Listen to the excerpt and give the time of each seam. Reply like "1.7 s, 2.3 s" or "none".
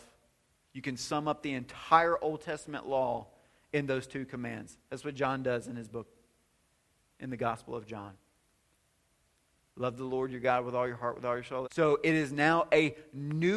11.6 s